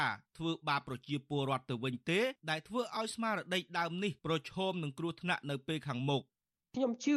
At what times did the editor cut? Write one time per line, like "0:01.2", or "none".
none